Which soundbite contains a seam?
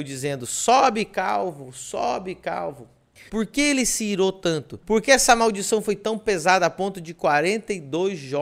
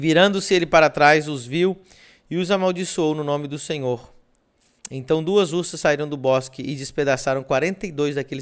first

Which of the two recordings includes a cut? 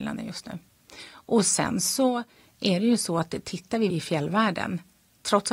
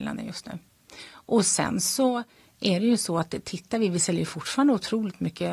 first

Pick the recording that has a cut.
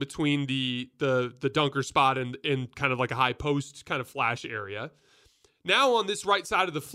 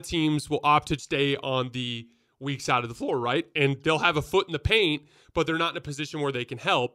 second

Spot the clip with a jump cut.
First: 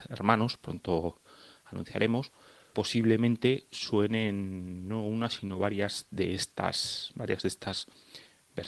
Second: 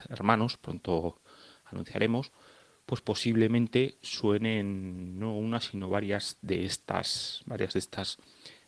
first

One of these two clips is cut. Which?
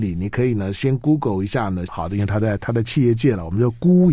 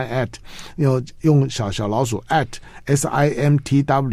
first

